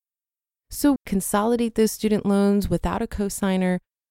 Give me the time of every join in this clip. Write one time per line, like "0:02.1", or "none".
0:01.0